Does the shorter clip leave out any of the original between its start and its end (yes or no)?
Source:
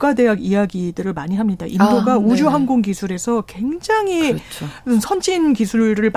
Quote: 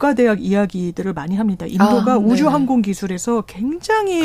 no